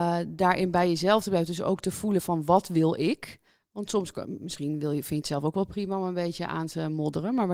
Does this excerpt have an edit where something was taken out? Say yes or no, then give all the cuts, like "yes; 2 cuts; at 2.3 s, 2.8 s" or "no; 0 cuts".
no; 0 cuts